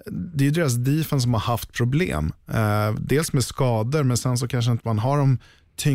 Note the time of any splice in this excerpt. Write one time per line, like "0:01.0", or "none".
none